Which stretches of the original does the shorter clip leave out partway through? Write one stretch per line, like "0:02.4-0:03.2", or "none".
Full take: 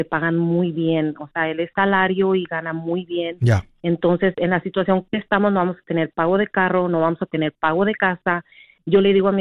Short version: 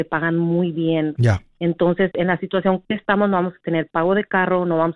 0:01.2-0:03.4